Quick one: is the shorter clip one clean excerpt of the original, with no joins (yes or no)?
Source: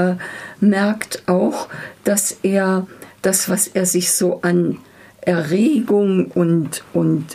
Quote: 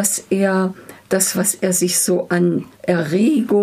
no